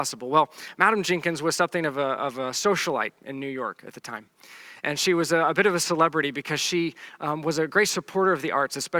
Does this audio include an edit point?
no; 0 cuts

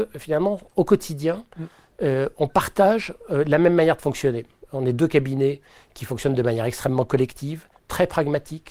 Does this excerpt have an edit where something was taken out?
no; 0 cuts

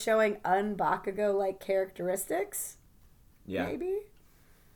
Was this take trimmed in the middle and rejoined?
no; 0 cuts

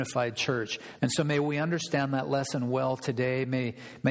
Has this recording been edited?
yes; 1 cut; at 1.0 s

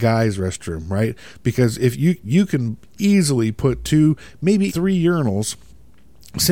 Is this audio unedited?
no; 1 cut; at 4.7 s

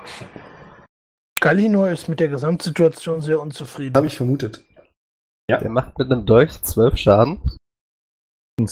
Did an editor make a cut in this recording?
yes; 1 cut; at 5.3 s

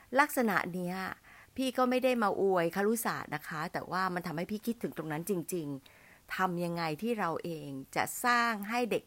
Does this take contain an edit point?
no; 0 cuts

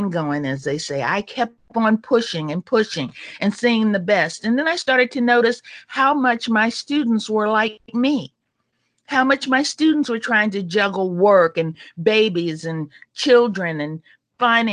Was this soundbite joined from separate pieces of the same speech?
no; 0 cuts

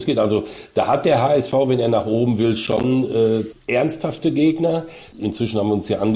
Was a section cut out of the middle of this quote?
yes; 1 cut; at 3.5 s

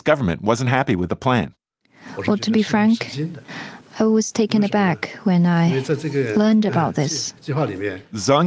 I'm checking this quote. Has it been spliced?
no; 0 cuts

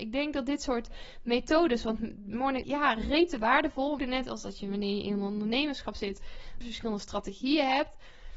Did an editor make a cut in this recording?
yes; 3 cuts; at 2.6 s, 4.0 s, 6.6 s

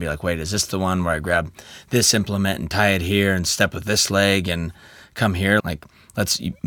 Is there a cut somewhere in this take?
yes; 1 cut; at 5.6 s

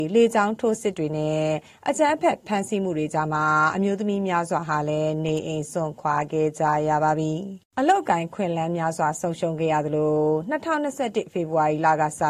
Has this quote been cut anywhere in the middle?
yes; 1 cut; at 7.7 s

